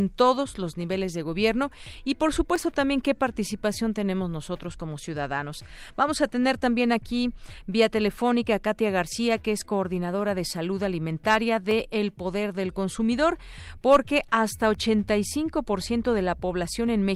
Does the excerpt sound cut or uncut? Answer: uncut